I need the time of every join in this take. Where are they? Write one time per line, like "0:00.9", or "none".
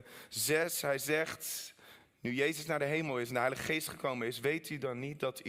none